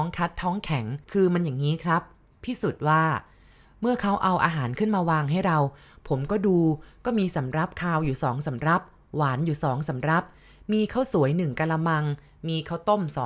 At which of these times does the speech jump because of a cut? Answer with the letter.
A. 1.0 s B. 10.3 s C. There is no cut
A